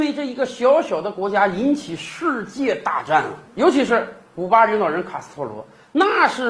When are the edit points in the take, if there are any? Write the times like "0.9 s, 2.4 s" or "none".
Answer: none

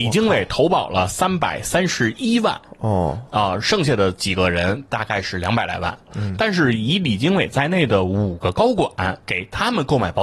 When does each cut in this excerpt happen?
6.1 s, 9.2 s

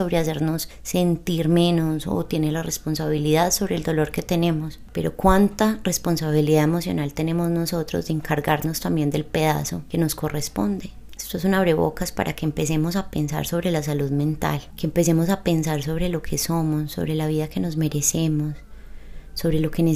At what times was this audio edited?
11.2 s

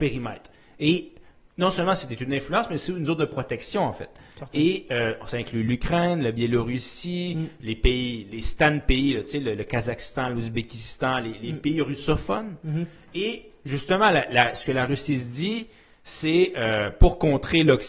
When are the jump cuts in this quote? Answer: none

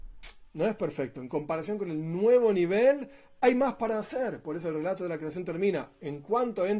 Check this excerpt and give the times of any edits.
none

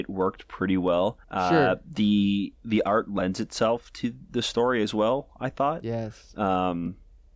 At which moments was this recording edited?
1.2 s

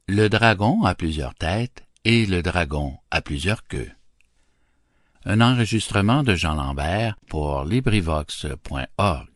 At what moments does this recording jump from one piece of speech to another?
5.1 s, 7.2 s

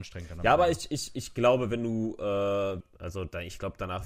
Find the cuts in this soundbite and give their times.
2.8 s

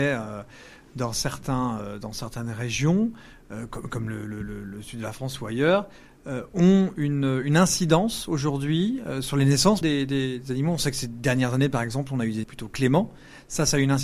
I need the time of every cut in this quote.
9.8 s, 12.4 s

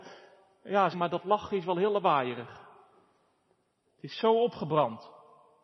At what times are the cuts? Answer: 0.9 s, 3.8 s

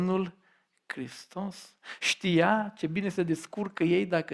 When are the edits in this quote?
2.0 s

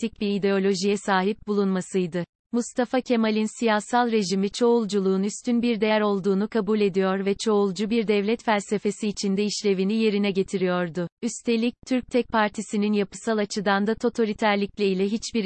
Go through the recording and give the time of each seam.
2.4 s, 11.1 s

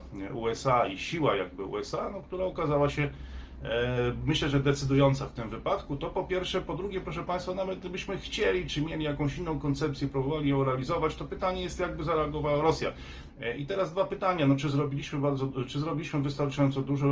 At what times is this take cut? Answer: 13.3 s

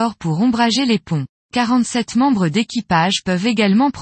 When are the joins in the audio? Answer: 1.3 s

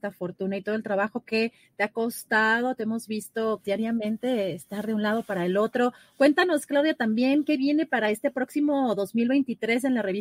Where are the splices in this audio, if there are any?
3.6 s

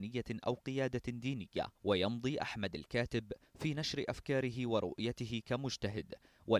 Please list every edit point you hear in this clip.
1.8 s

